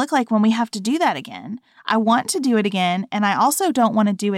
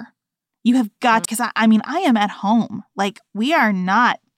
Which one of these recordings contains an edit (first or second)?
second